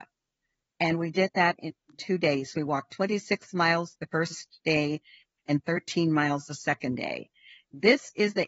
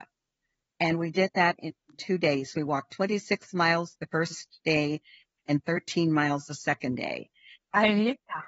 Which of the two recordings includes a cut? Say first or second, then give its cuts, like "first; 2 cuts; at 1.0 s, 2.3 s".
second; 1 cut; at 7.6 s